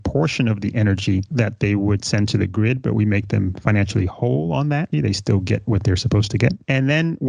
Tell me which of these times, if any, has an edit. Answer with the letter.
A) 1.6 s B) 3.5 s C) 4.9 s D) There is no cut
C